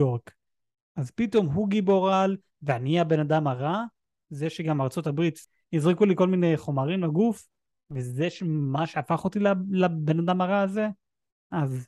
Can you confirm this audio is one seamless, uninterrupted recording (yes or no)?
yes